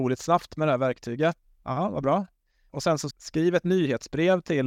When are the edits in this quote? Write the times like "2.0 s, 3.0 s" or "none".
1.4 s, 3.1 s